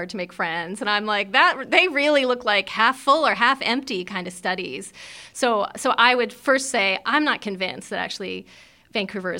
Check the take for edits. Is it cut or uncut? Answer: uncut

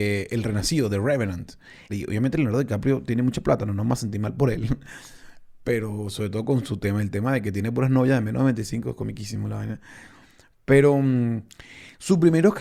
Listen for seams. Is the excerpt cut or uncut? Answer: cut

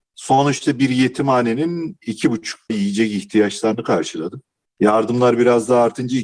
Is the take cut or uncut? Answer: cut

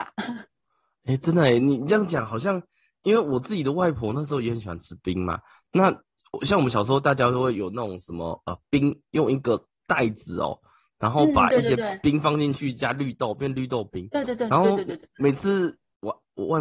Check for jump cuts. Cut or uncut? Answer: uncut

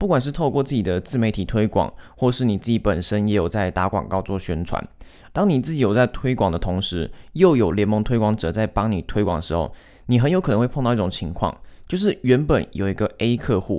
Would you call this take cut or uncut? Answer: uncut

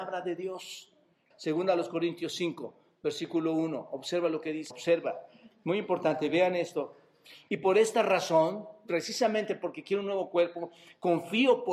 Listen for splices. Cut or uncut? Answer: cut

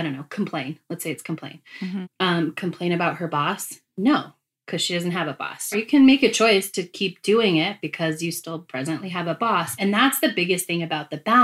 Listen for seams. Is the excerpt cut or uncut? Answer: cut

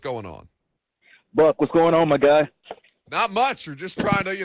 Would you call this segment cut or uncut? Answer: uncut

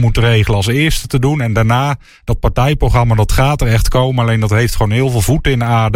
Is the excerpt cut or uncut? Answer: uncut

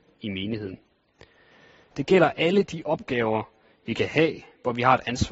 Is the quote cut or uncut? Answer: cut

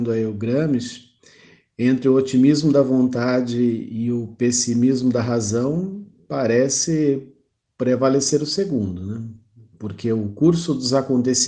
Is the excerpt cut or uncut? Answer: uncut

